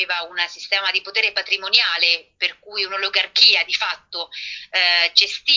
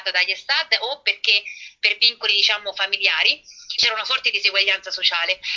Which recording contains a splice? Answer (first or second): second